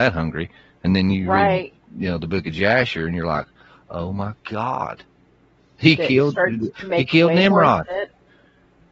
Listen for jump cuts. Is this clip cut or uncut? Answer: uncut